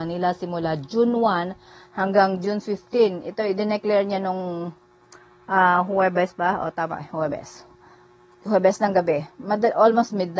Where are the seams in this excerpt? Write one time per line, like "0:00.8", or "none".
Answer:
none